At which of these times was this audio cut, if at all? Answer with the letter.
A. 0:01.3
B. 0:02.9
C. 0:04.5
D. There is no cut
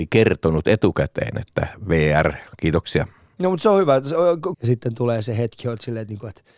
C